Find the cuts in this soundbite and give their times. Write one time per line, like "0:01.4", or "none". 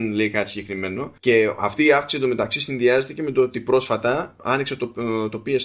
0:01.2